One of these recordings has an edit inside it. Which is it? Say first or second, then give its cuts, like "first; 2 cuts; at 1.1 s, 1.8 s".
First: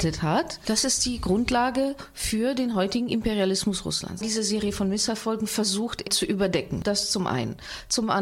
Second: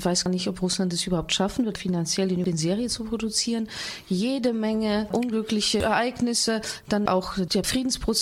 first; 2 cuts; at 4.2 s, 6.0 s